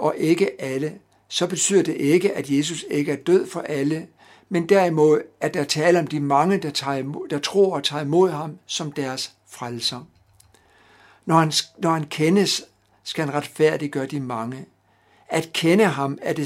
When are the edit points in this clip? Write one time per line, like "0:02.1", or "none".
none